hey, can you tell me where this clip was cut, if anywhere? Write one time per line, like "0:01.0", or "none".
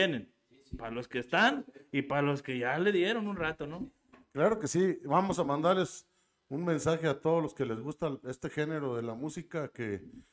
none